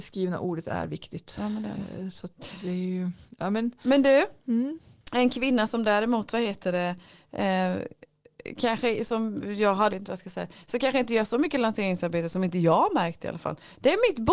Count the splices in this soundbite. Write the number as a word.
one